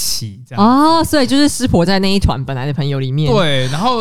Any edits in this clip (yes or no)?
no